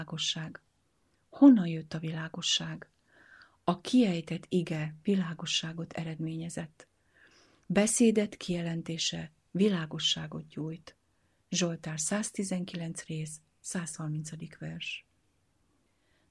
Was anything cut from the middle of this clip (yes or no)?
no